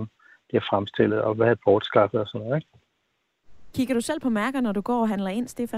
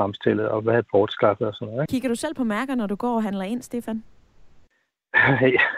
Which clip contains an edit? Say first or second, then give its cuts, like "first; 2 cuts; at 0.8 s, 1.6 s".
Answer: second; 1 cut; at 1.9 s